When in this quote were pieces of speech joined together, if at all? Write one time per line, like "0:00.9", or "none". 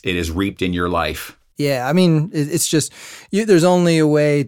0:01.6